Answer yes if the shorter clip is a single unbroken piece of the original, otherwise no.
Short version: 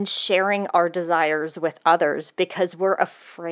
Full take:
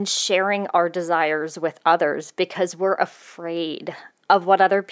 yes